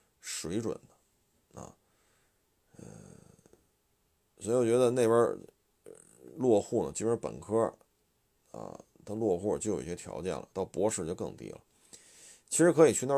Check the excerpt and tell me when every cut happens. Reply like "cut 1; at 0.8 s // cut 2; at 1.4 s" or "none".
cut 1; at 10.5 s